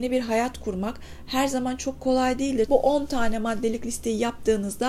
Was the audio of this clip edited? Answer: yes; 1 cut; at 2.7 s

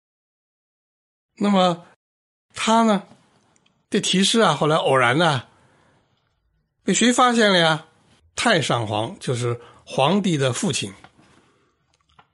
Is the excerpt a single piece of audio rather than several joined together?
no; 1 cut; at 8.2 s

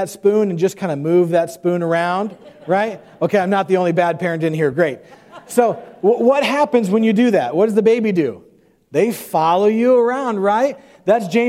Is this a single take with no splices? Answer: yes; 0 cuts

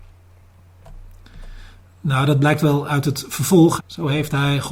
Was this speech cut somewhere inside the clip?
yes; 1 cut; at 3.8 s

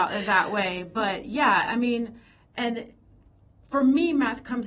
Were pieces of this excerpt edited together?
no; 0 cuts

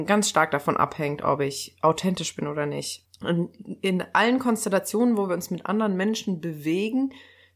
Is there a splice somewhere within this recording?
yes; 1 cut; at 3.0 s

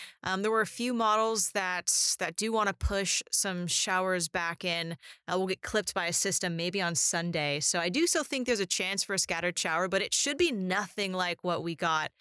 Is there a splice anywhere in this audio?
no; 0 cuts

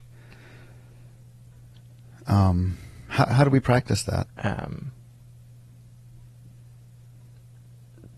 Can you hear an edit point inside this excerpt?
yes; 1 cut; at 4.2 s

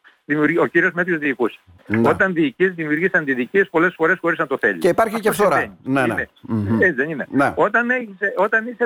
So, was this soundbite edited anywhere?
no; 0 cuts

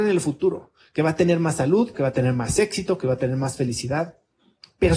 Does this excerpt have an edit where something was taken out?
yes; 1 cut; at 1.9 s

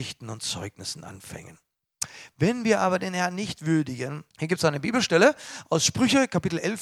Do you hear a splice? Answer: yes; 1 cut; at 4.3 s

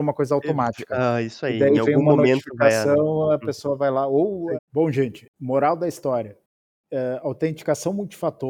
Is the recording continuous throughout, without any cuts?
no; 1 cut; at 4.5 s

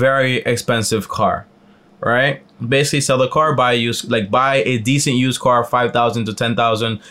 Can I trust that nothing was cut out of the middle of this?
no; 1 cut; at 2.6 s

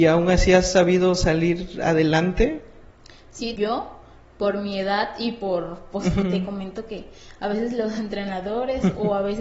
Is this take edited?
yes; 2 cuts; at 3.6 s, 6.2 s

